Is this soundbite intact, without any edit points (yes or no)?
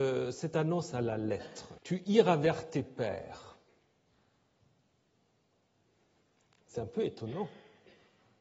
no